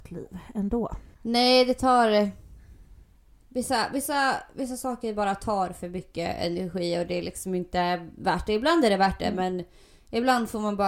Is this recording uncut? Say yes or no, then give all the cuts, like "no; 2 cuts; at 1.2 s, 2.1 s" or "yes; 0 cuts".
no; 1 cut; at 1.1 s